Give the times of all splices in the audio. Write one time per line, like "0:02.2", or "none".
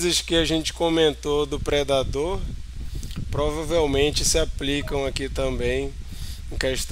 none